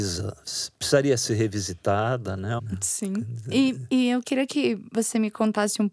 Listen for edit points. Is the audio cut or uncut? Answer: cut